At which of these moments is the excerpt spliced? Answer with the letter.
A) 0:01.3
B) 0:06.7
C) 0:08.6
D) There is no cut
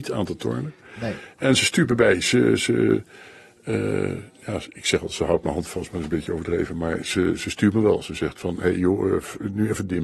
D